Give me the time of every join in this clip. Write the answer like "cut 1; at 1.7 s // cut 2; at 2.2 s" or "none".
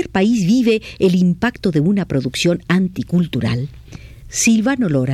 cut 1; at 4.2 s

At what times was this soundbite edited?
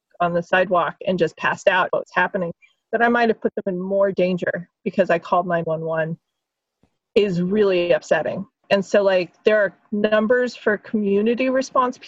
cut 1; at 1.9 s // cut 2; at 8.6 s

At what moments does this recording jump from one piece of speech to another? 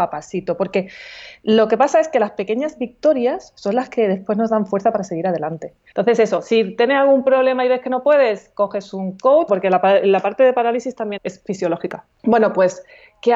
cut 1; at 5.9 s // cut 2; at 9.5 s // cut 3; at 11.2 s

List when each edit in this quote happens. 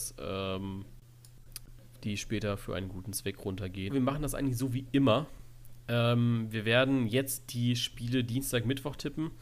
cut 1; at 3.9 s

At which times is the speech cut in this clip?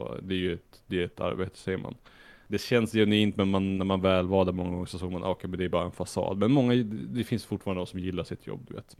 none

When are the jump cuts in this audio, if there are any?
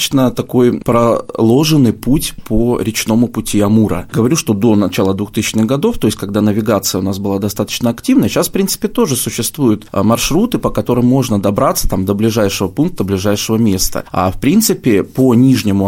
none

